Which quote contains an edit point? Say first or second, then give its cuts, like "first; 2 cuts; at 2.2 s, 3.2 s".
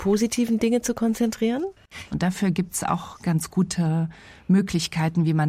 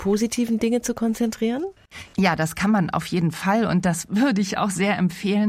first; 1 cut; at 2.1 s